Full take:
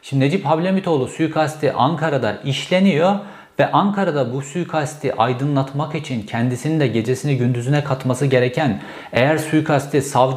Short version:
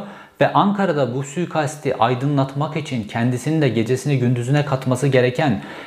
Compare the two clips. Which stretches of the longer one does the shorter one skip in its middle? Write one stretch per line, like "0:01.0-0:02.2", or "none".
none